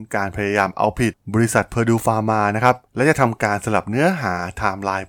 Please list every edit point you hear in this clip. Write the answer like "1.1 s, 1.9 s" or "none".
2.8 s

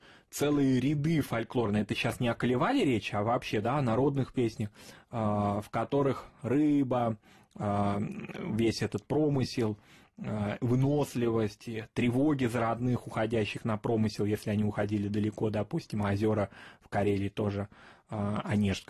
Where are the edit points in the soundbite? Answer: none

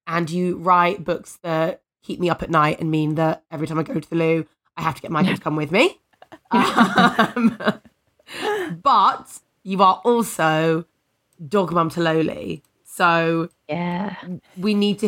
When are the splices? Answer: none

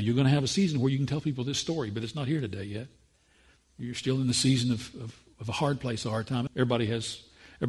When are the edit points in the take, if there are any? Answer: 6.5 s

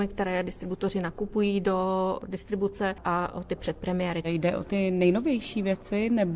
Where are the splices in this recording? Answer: 4.2 s

